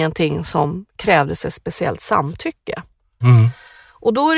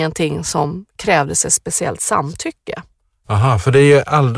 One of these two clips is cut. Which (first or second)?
first